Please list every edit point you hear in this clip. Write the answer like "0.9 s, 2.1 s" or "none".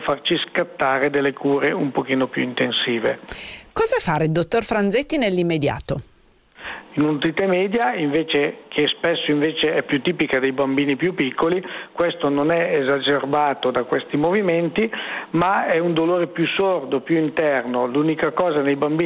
6.9 s